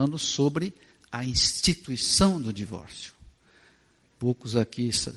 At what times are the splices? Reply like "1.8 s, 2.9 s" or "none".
4.0 s